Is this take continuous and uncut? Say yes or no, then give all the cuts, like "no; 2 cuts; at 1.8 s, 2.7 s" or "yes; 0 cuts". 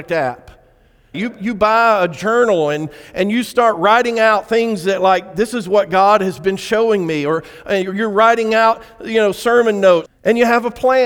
no; 2 cuts; at 1.1 s, 10.1 s